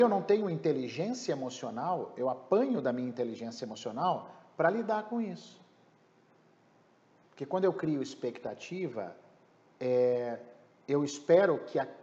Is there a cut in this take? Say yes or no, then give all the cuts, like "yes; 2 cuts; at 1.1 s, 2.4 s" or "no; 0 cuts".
yes; 1 cut; at 7.2 s